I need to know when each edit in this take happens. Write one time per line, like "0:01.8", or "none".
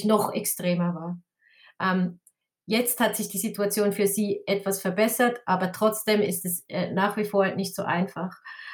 none